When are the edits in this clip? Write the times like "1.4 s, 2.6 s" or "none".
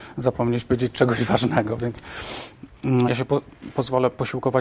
3.0 s